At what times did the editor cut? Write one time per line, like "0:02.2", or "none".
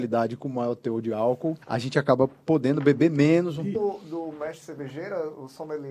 0:01.6
0:03.7